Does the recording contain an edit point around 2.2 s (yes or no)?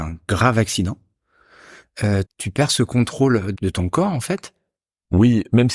yes